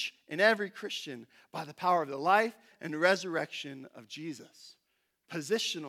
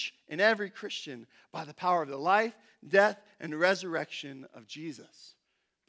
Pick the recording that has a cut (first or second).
first